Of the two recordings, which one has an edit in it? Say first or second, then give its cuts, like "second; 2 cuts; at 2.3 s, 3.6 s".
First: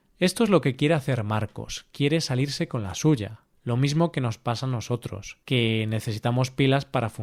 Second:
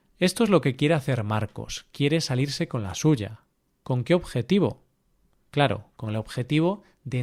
first; 2 cuts; at 3.5 s, 5.4 s